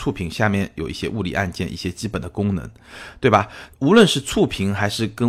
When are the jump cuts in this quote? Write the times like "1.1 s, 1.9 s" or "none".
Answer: 3.7 s